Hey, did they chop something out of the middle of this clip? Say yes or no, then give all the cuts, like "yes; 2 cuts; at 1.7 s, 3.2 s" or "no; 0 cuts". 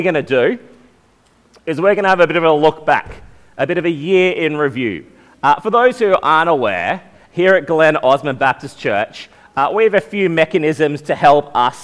no; 0 cuts